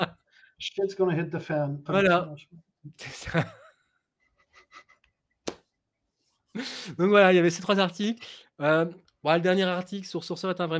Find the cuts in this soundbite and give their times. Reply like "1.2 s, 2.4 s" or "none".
1.9 s

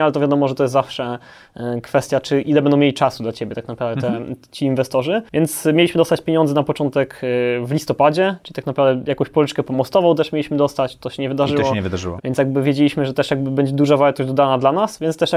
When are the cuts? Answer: 12.2 s

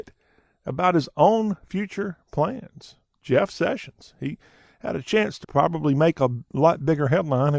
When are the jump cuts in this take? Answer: 5.4 s

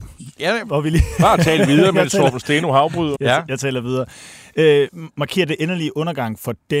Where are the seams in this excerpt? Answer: 3.2 s

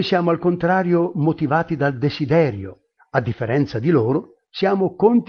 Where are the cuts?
3.0 s

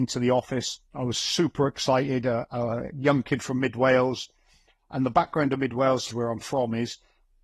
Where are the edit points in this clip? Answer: 6.1 s

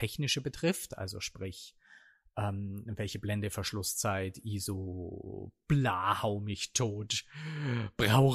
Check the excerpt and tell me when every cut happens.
none

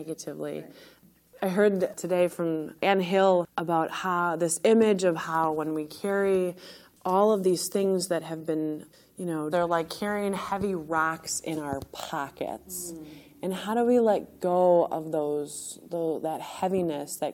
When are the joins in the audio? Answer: 9.5 s

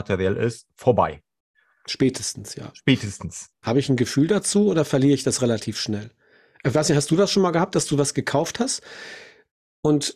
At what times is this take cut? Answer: 3.6 s

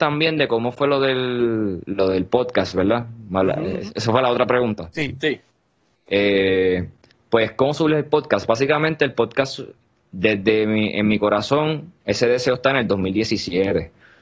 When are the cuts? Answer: none

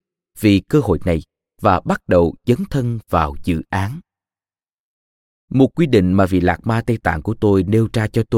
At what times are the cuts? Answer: none

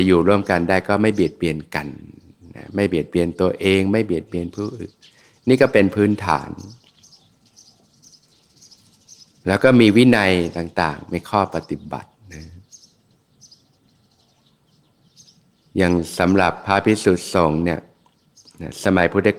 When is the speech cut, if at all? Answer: none

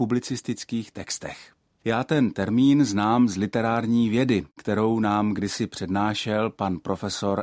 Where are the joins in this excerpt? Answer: 1.8 s

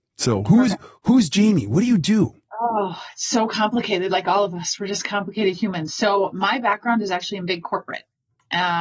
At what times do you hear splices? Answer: none

